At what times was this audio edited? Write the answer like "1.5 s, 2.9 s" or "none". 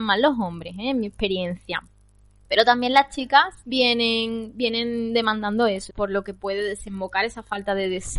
3.6 s, 5.9 s